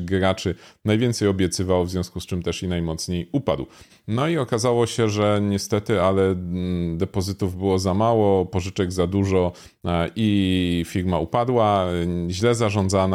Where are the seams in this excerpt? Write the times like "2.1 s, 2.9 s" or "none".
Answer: 3.9 s